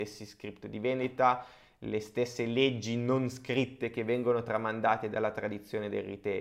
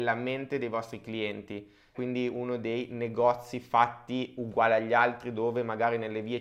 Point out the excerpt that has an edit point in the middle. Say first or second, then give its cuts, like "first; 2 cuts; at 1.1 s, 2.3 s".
second; 1 cut; at 1.9 s